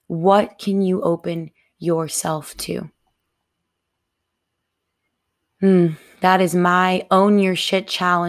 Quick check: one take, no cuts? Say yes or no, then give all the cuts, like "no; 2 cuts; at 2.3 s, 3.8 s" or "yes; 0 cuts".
yes; 0 cuts